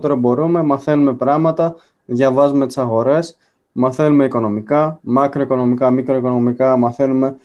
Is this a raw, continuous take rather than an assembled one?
yes; 0 cuts

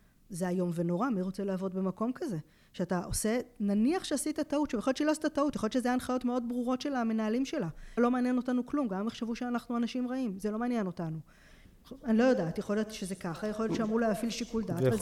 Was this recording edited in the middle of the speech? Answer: yes; 1 cut; at 8.0 s

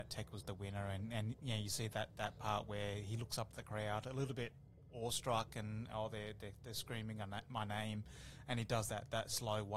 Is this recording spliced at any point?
no; 0 cuts

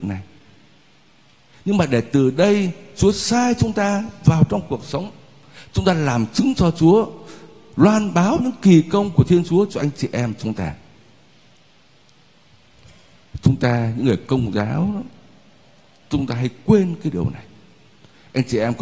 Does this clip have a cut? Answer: no; 0 cuts

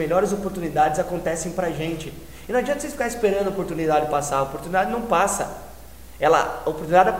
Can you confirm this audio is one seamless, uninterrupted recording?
yes; 0 cuts

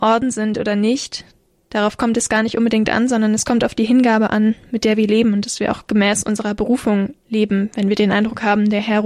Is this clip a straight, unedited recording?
yes; 0 cuts

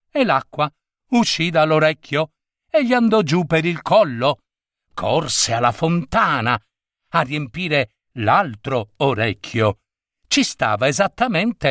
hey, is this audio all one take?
yes; 0 cuts

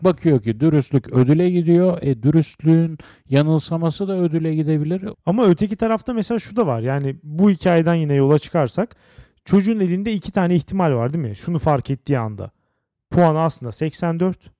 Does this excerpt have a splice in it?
yes; 1 cut; at 5.1 s

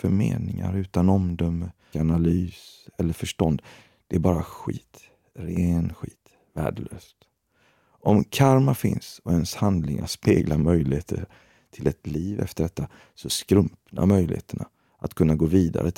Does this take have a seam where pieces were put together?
yes; 1 cut; at 1.9 s

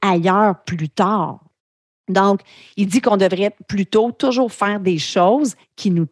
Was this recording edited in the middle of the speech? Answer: no; 0 cuts

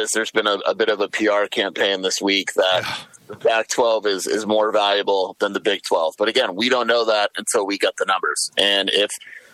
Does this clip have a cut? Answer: no; 0 cuts

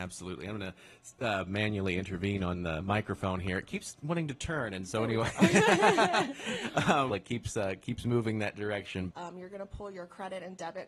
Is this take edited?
yes; 2 cuts; at 7.1 s, 9.1 s

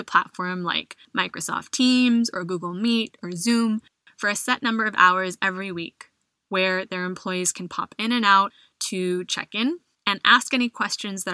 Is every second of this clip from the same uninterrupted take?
yes; 0 cuts

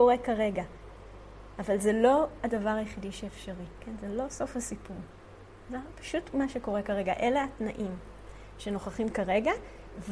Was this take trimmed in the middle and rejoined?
no; 0 cuts

